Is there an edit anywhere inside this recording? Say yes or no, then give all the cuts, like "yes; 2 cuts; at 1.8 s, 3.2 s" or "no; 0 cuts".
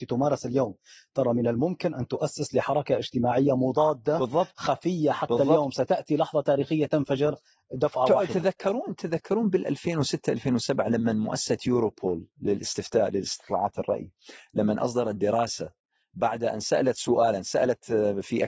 no; 0 cuts